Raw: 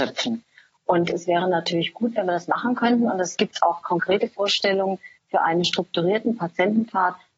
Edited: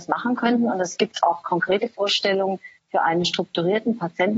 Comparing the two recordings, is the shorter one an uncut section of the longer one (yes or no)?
yes